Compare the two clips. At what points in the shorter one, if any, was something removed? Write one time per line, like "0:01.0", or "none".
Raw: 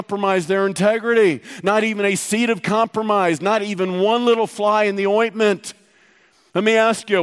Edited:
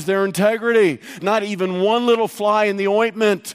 0:01.2